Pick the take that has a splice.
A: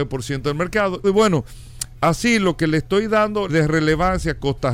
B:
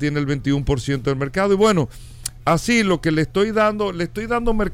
A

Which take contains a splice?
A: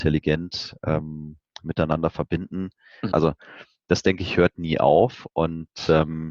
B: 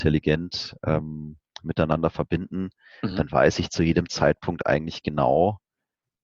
A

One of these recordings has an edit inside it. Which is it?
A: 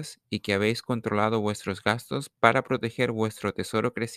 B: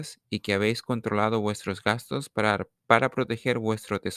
A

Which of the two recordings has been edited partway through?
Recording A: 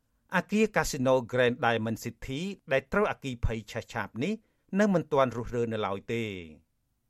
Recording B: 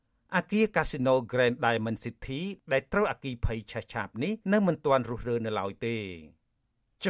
B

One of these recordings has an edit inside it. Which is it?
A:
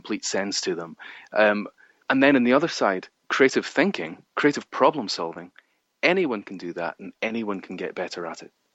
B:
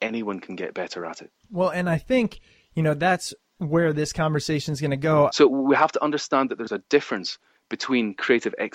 B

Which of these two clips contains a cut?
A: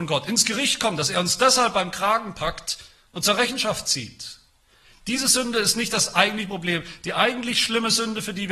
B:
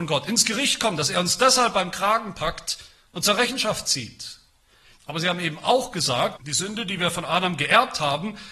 B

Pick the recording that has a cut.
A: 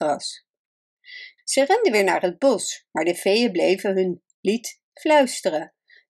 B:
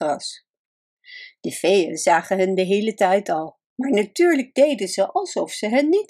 A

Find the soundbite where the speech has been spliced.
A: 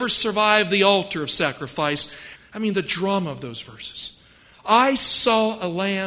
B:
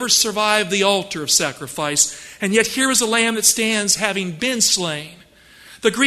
A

